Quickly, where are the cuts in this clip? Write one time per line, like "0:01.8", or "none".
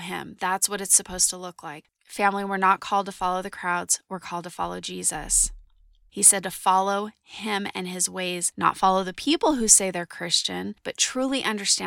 none